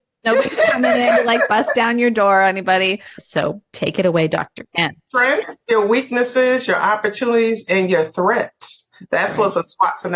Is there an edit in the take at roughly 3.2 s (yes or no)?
yes